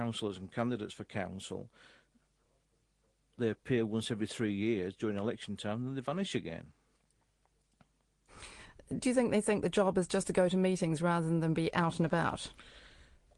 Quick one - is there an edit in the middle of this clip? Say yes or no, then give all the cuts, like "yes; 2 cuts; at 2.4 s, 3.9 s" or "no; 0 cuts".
no; 0 cuts